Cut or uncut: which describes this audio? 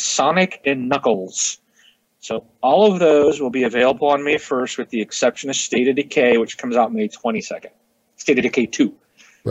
uncut